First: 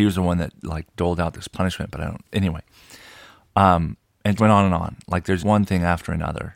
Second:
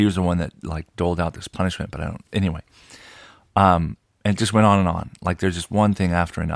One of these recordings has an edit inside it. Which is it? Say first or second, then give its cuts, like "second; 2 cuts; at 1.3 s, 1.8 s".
first; 2 cuts; at 4.4 s, 5.4 s